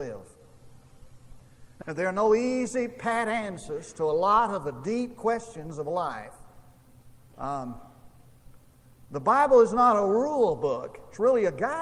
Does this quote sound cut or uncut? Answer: cut